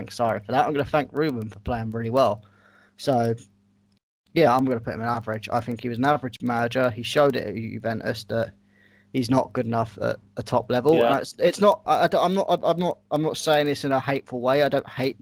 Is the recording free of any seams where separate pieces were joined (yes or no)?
no